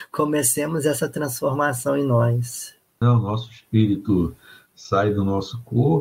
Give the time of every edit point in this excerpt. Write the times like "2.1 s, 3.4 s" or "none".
3.0 s

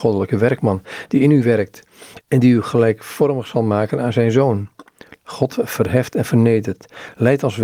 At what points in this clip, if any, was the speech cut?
5.2 s

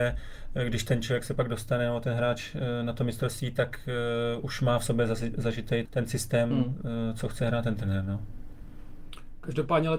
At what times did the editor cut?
5.8 s

